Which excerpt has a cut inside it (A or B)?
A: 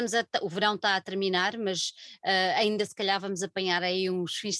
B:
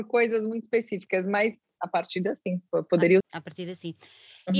B